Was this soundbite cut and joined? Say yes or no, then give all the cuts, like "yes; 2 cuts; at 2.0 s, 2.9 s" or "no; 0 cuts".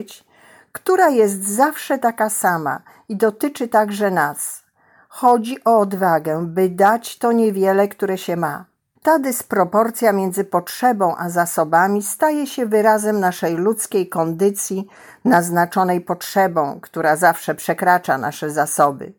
yes; 1 cut; at 9.0 s